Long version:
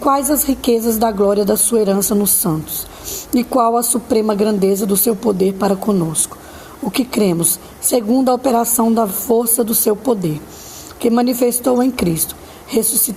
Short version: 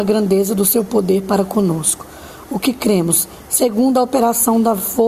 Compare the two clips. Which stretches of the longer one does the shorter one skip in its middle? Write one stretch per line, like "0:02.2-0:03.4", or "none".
none

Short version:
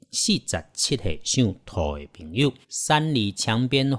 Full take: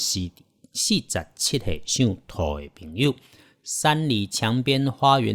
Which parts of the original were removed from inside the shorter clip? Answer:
0:03.2-0:03.6

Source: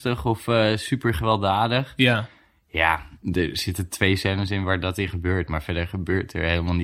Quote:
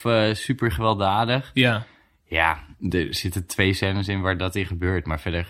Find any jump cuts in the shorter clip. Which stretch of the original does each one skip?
none

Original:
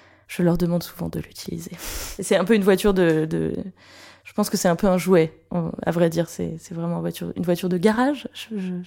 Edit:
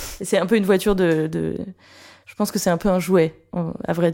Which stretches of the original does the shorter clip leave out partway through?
none

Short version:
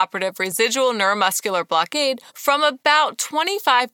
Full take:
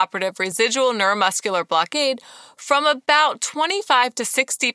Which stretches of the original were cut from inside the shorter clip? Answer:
0:02.3-0:02.5

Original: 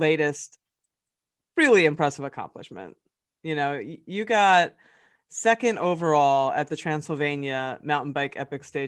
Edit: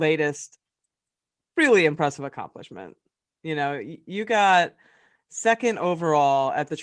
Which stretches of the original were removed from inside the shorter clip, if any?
none

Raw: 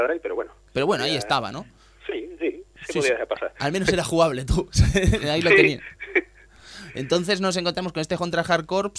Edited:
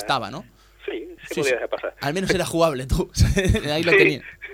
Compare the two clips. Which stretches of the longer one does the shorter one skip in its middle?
0:02.4-0:02.7

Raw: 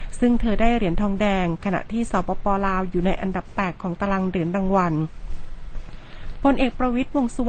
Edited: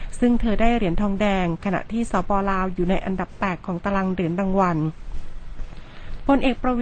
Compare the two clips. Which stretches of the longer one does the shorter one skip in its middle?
0:02.3-0:02.4

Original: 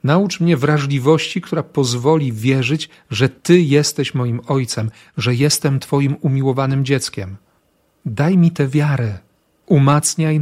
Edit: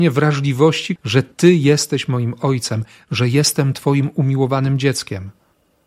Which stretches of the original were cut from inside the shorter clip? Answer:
0:01.4-0:03.0

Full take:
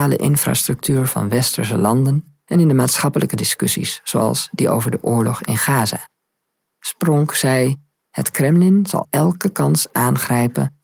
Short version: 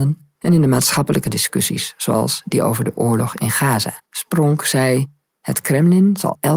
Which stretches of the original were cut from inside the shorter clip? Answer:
0:06.1-0:06.7

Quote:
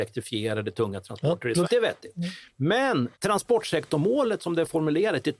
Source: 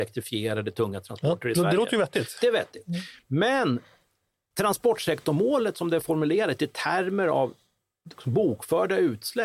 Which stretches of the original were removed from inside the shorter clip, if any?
0:01.6-0:02.3
0:03.8-0:04.5

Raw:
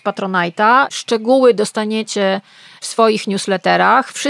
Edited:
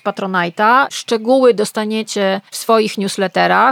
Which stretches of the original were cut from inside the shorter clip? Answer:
0:02.5-0:02.8

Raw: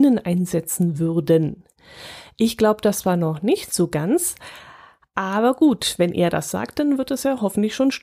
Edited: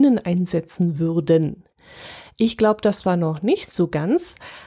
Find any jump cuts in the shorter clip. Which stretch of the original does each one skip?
none

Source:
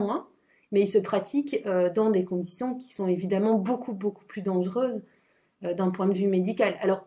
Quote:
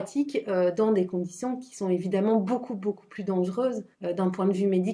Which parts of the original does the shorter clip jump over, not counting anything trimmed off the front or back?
0:05.1-0:05.5

